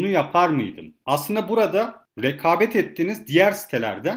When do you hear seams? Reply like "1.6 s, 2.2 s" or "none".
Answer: 1.0 s

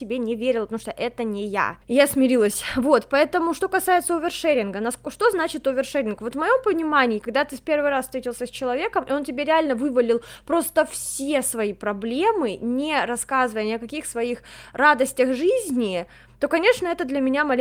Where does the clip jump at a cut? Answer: none

